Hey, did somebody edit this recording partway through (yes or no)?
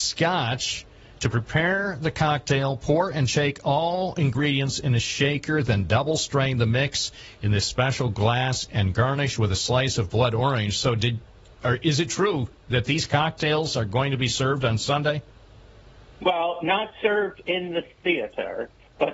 no